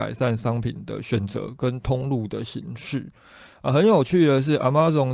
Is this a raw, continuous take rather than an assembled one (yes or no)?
yes